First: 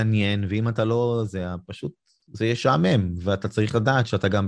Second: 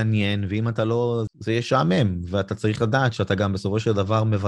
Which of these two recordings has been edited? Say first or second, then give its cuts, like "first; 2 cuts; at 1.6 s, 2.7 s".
second; 1 cut; at 1.3 s